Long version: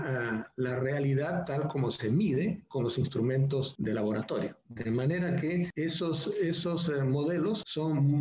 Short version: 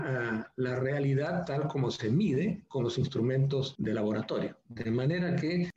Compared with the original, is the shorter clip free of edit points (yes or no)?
yes